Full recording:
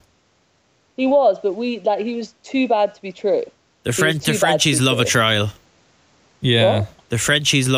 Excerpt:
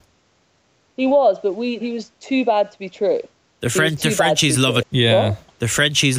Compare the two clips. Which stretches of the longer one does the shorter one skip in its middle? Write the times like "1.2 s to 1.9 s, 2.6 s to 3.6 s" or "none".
1.8 s to 2.0 s, 5.0 s to 6.3 s